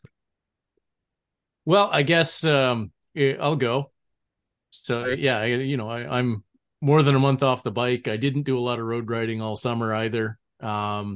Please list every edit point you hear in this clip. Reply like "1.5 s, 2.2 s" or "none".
none

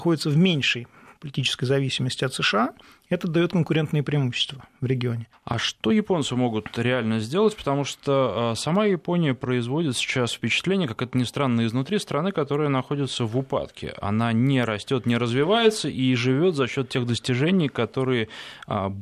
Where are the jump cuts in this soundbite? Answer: 5.3 s

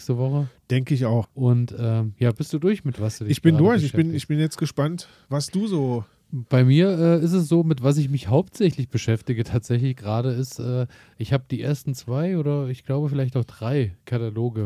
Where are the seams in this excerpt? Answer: 1.2 s

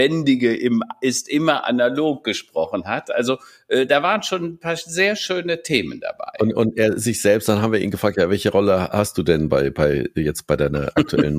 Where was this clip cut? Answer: none

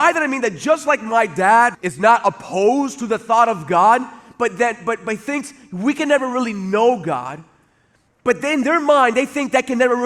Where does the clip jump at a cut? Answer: 1.7 s, 8.1 s

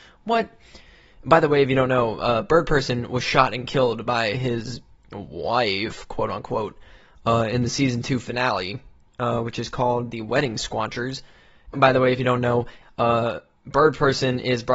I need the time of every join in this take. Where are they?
11.7 s, 12.8 s

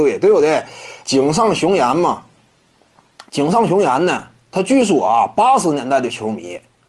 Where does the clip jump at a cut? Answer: 1.0 s, 3.3 s

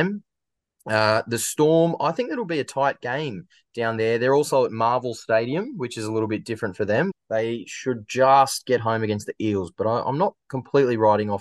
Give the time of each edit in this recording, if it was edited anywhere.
7.1 s

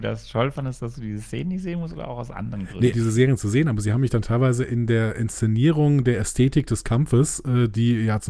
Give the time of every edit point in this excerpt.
2.9 s

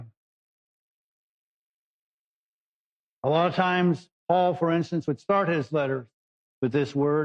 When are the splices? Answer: none

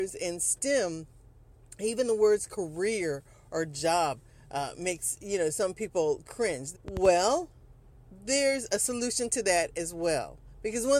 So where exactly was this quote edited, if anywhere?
6.7 s

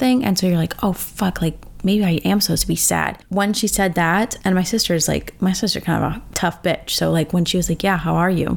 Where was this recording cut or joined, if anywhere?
none

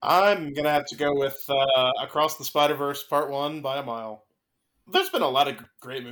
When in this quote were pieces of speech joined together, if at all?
4.9 s

